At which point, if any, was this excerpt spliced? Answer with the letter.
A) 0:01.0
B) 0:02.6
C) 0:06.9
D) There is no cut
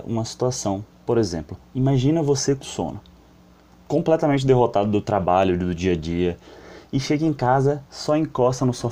B